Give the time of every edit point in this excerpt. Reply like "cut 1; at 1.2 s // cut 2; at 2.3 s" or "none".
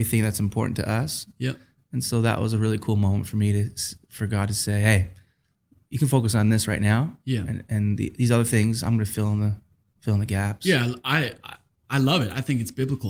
none